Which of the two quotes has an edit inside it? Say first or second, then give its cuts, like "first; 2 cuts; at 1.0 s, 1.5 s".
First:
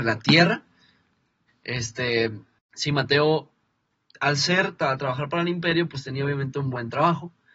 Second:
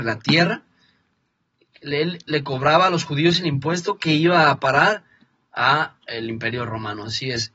first; 1 cut; at 1.5 s